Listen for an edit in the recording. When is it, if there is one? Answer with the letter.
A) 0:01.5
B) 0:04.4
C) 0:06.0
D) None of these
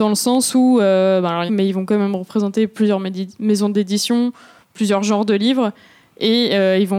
A